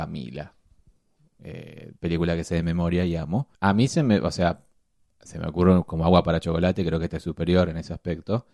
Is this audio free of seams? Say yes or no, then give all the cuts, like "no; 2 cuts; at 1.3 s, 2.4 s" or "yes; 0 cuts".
no; 2 cuts; at 2.0 s, 3.5 s